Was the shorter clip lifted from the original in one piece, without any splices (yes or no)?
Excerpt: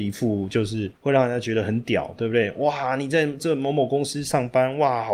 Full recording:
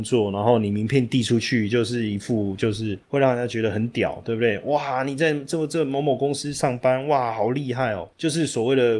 no